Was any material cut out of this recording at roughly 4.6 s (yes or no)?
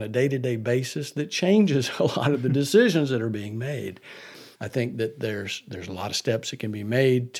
yes